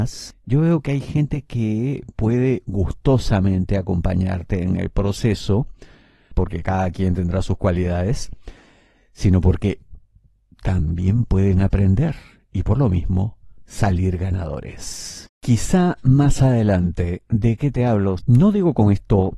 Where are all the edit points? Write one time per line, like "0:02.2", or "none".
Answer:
0:06.3
0:15.3
0:18.2